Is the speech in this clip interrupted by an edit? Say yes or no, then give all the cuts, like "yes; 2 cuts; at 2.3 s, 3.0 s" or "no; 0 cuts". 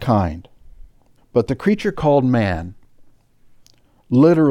yes; 1 cut; at 1.2 s